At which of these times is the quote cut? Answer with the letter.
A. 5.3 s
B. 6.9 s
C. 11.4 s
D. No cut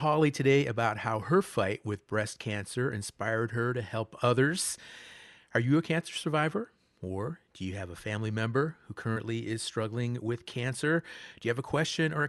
D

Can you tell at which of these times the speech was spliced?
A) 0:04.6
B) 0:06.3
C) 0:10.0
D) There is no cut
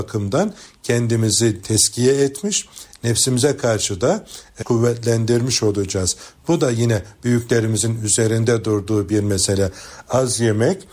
A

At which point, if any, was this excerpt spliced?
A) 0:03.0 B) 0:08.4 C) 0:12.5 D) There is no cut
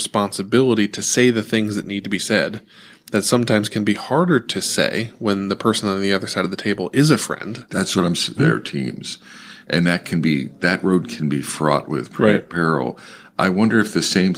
B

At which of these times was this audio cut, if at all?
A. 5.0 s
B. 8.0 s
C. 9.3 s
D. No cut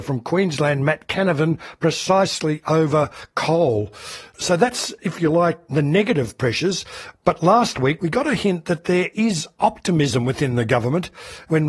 B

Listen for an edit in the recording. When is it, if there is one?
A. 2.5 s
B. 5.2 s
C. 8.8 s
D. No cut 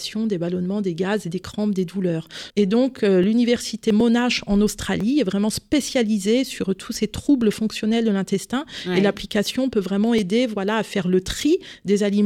A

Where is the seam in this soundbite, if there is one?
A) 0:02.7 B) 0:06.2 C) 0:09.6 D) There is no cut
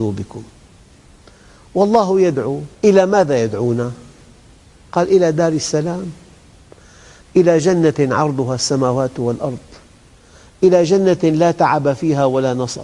A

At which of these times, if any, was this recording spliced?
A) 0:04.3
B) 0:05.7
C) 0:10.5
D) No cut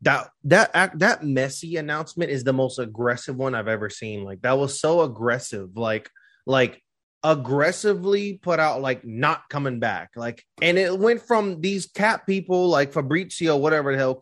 C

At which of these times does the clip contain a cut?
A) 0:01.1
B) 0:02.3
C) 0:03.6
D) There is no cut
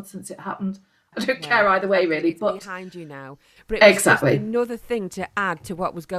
A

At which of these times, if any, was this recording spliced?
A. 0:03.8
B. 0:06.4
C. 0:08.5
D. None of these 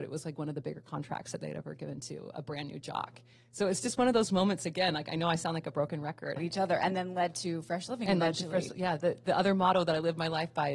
B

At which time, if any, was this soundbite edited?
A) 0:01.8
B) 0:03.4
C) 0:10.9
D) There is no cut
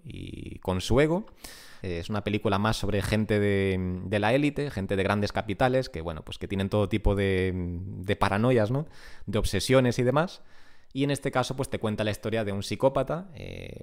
A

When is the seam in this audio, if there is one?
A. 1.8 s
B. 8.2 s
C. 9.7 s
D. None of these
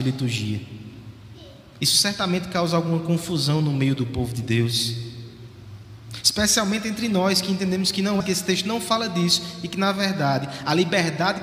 B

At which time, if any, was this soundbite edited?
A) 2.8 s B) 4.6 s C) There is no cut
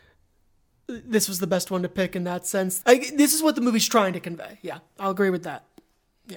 A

